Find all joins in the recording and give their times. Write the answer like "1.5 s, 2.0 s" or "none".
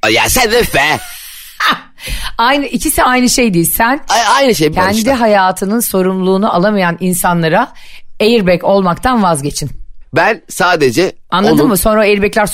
4.7 s